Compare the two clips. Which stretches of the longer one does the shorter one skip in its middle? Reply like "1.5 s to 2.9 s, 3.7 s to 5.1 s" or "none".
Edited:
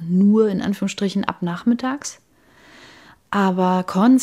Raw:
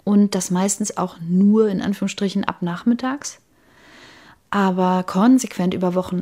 none